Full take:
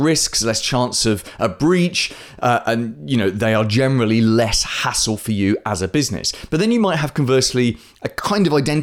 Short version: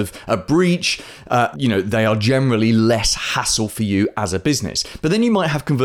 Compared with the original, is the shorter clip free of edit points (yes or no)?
no